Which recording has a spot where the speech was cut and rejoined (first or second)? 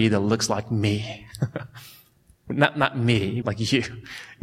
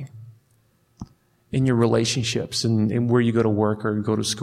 first